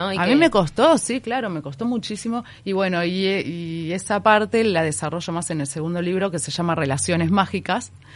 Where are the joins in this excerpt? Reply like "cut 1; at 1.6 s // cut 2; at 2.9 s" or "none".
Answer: none